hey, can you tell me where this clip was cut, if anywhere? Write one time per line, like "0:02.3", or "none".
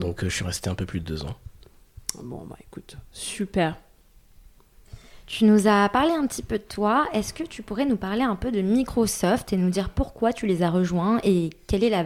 none